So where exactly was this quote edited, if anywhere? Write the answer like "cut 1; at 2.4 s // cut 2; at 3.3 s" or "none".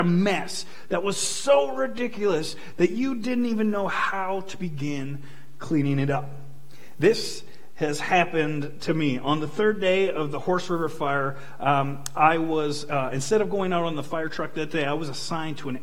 none

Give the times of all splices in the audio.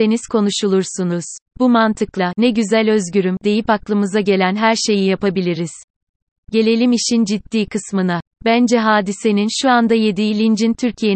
cut 1; at 1.5 s // cut 2; at 6.3 s

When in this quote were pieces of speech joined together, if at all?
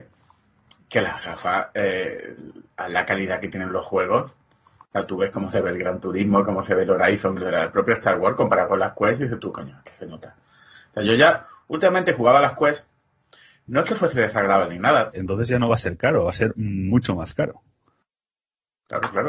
cut 1; at 7.4 s // cut 2; at 15.1 s

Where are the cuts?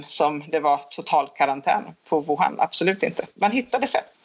none

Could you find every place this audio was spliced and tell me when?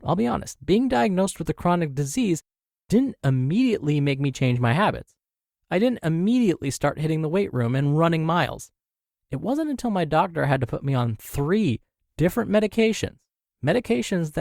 none

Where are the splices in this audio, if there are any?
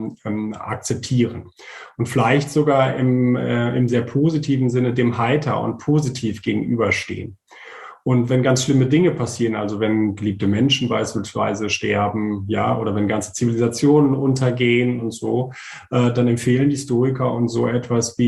none

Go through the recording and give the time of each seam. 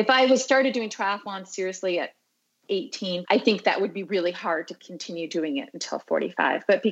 cut 1; at 3.2 s

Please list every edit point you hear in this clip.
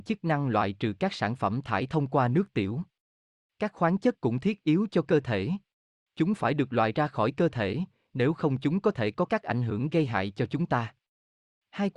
cut 1; at 3.4 s // cut 2; at 6.1 s

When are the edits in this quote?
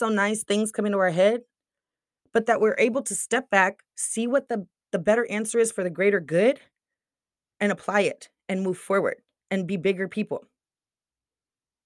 none

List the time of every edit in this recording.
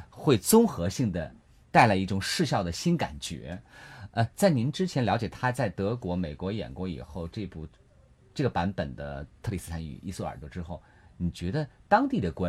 none

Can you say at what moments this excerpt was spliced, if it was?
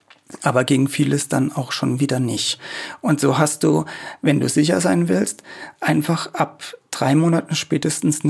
none

